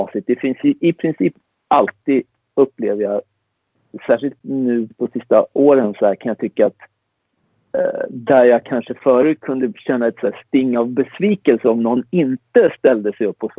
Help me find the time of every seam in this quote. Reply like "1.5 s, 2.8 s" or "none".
none